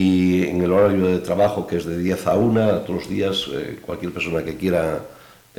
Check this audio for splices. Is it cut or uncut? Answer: uncut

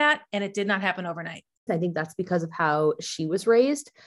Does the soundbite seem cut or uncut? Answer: cut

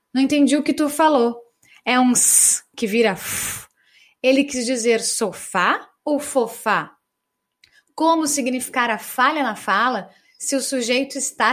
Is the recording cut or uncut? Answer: uncut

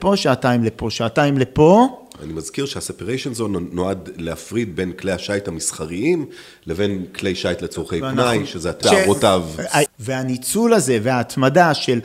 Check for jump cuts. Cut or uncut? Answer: cut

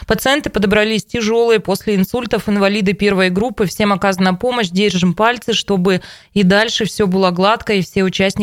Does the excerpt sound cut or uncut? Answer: uncut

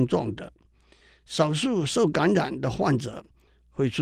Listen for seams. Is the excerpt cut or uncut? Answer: uncut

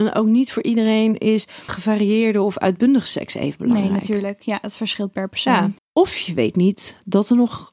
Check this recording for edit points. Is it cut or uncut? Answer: cut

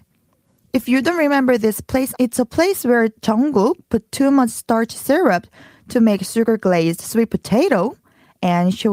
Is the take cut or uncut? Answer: cut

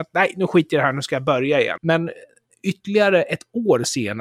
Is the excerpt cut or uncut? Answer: cut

